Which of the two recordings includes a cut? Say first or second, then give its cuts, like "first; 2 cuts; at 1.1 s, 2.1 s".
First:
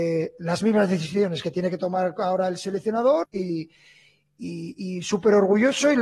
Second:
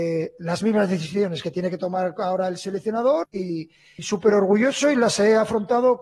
second; 1 cut; at 4.0 s